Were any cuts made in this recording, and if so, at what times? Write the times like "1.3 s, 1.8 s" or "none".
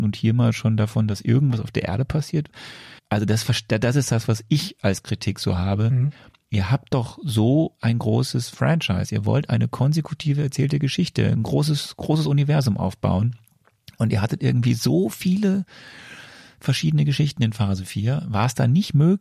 3.0 s